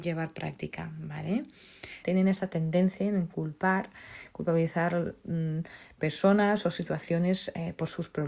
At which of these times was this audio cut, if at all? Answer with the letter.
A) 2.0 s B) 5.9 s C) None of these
A